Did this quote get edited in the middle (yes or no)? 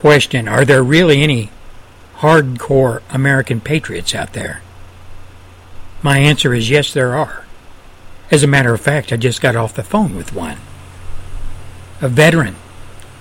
no